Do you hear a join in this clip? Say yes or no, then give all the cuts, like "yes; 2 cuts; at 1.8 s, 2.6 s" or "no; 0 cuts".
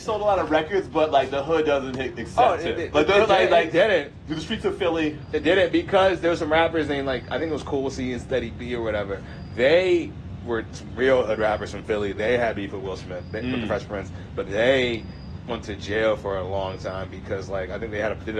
yes; 1 cut; at 14.5 s